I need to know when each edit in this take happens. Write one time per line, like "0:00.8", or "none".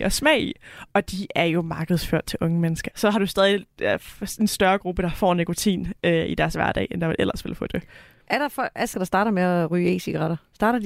0:02.9
0:08.9